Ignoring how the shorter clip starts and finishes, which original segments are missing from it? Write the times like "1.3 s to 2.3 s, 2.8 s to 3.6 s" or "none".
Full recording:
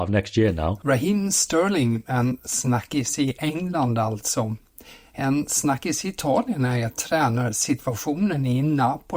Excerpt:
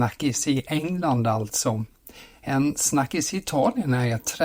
none